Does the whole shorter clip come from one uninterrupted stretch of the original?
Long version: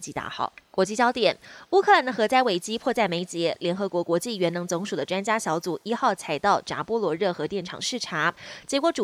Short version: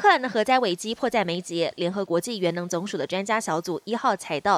no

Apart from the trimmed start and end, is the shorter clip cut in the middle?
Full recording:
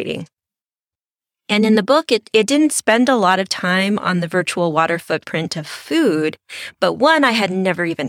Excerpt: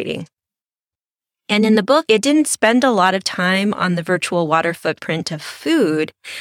yes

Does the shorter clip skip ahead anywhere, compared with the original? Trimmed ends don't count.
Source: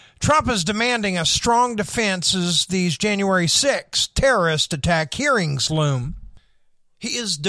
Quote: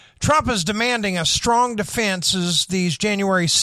no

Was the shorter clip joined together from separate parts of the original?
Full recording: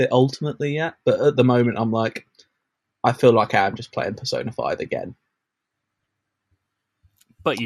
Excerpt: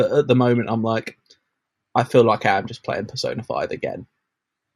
no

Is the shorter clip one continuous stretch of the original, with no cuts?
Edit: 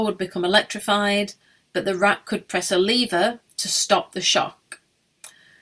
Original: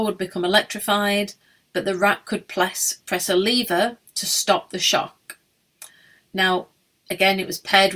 no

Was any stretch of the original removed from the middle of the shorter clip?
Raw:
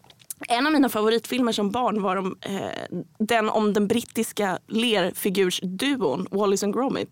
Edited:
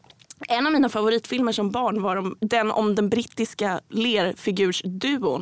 yes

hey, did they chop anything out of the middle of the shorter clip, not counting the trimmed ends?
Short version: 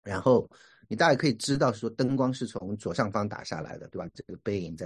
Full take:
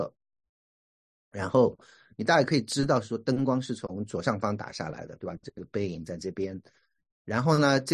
no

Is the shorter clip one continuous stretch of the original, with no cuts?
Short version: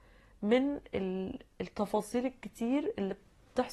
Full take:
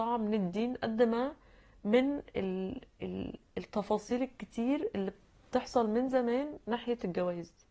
no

